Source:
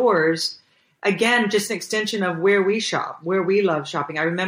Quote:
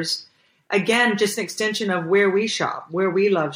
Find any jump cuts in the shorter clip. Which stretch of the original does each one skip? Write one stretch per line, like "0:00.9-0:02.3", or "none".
none